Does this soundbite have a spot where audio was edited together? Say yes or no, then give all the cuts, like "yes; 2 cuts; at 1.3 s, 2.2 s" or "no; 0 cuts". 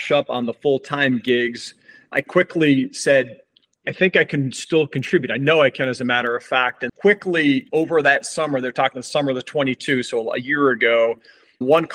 yes; 1 cut; at 6.9 s